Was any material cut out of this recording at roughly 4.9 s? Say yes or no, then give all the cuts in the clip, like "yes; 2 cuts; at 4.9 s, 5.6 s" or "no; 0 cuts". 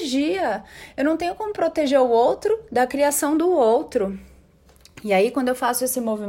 no; 0 cuts